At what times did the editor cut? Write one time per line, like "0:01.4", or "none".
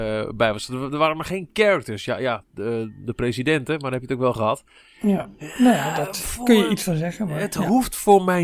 none

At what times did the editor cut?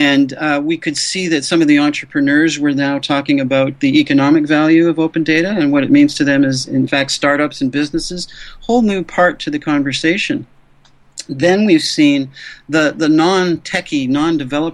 none

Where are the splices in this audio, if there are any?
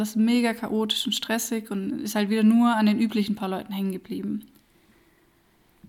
none

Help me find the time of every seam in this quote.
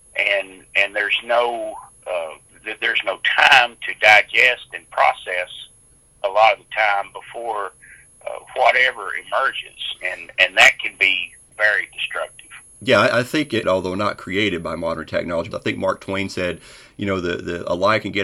0:11.5
0:13.6
0:15.5

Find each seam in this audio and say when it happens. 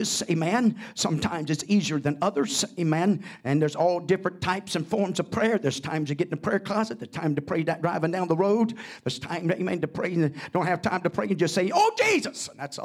none

